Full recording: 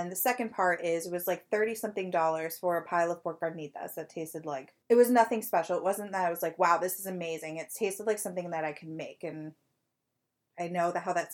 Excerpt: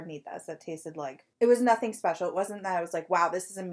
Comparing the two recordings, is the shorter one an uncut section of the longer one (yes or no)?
yes